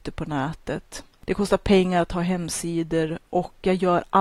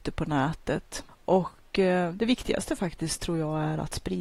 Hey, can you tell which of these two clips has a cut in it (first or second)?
second